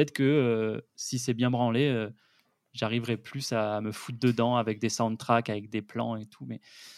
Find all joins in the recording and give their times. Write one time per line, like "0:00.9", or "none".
none